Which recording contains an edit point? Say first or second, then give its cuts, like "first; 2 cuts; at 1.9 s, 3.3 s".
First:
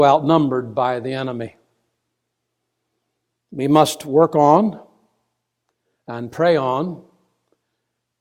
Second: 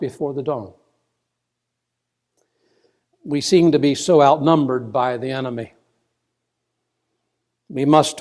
second; 1 cut; at 3.1 s